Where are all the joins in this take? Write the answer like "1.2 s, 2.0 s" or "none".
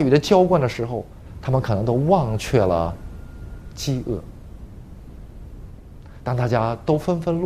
none